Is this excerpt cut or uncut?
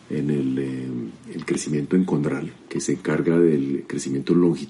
uncut